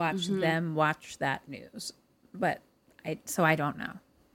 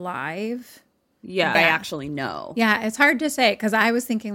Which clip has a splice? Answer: second; 1 cut; at 1.5 s

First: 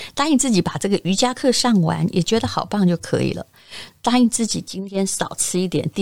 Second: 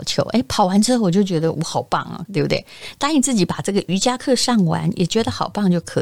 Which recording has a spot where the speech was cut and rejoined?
second; 1 cut; at 2.3 s

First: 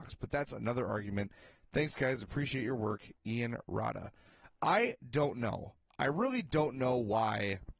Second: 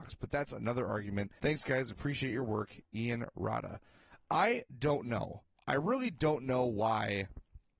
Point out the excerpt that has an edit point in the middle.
second; 1 cut; at 1.4 s

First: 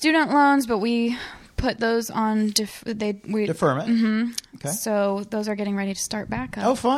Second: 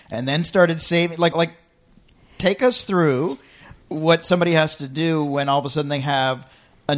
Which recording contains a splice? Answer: second; 2 cuts; at 1.3 s, 3.8 s

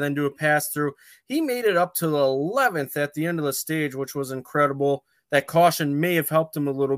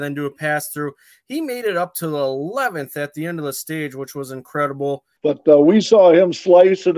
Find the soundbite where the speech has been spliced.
second; 1 cut; at 5.2 s

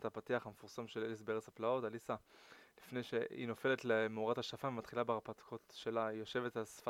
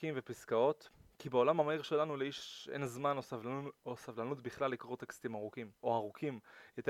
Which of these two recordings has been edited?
second; 1 cut; at 5.8 s

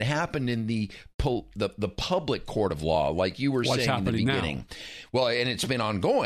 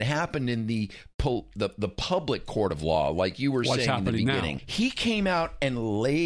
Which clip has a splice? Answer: second; 1 cut; at 4.6 s

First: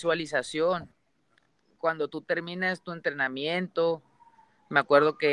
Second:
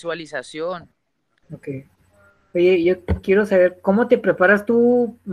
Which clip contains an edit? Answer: second; 1 cut; at 1.4 s

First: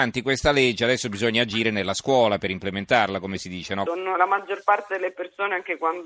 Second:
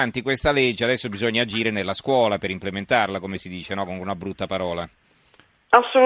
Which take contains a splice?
first; 1 cut; at 3.9 s

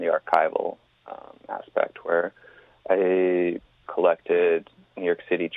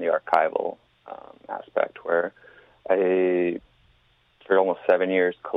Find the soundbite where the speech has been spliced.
first; 1 cut; at 3.8 s

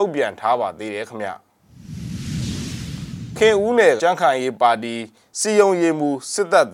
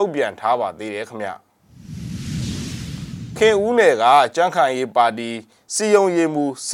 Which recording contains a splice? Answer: first; 1 cut; at 4.0 s

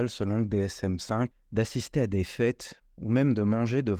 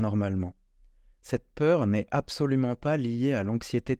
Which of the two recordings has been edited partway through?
first; 1 cut; at 1.3 s

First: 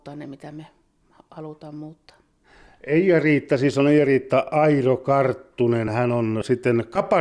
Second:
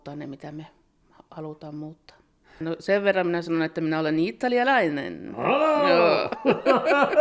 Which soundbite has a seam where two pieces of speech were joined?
second; 1 cut; at 2.6 s

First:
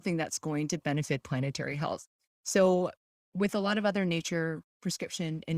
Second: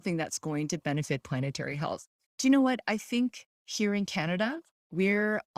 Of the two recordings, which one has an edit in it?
second; 1 cut; at 2.3 s

